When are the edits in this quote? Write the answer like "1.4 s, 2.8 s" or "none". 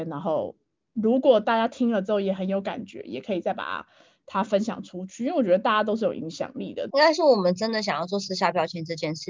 6.9 s